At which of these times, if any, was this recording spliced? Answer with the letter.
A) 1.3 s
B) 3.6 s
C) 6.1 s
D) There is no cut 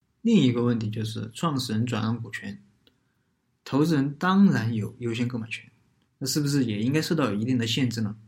C